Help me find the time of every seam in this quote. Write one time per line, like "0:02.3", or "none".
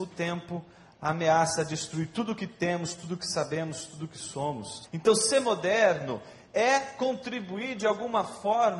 0:04.8